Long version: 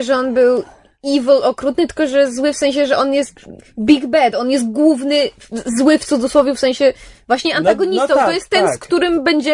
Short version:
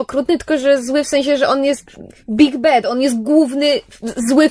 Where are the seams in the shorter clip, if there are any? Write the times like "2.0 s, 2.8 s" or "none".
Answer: none